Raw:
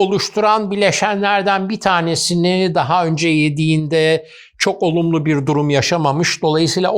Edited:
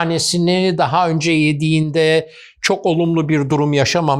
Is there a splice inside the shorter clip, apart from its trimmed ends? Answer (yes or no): no